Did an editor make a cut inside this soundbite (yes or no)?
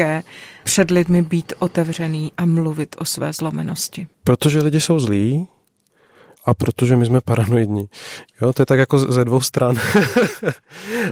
yes